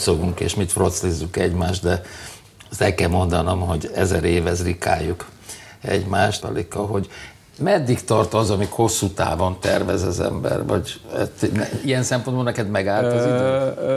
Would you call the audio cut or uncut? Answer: cut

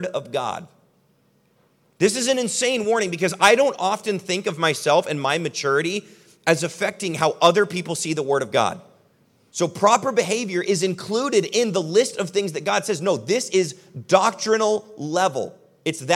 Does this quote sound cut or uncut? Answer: cut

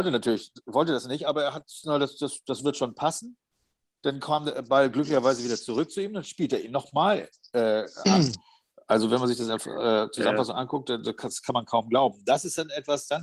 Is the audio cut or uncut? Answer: cut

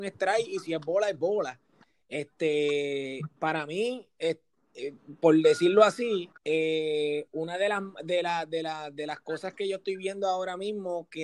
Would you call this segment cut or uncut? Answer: cut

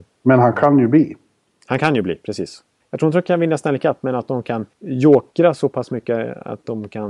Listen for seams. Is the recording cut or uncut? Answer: cut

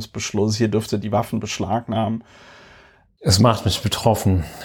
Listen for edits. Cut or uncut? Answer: cut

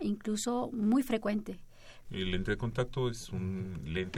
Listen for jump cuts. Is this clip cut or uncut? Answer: cut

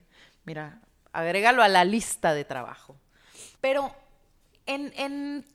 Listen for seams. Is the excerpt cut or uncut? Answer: cut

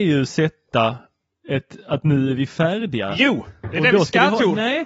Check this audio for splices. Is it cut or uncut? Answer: uncut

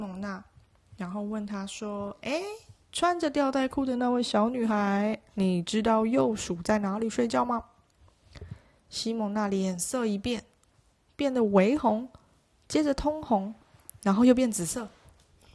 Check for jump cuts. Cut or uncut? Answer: uncut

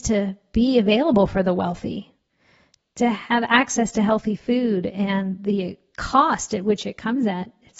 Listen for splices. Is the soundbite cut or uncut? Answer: uncut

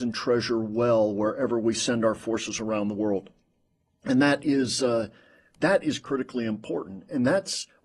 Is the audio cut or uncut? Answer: uncut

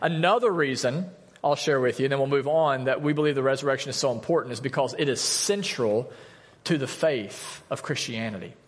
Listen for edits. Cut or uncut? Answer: uncut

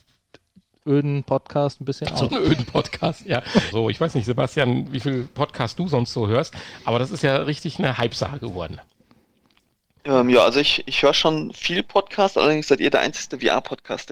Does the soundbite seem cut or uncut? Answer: cut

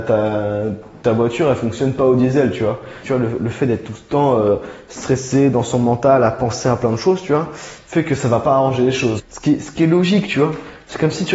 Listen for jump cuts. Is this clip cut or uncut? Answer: cut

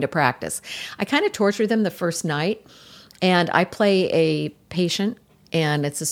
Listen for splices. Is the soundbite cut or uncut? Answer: uncut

